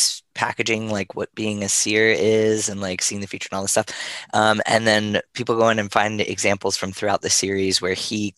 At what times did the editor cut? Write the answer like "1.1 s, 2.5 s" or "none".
none